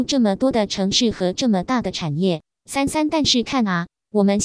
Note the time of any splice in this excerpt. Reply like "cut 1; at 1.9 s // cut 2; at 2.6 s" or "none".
none